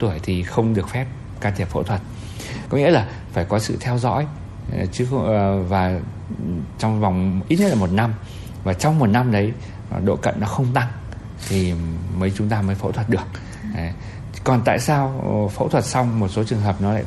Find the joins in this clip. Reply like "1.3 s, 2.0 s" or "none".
2.7 s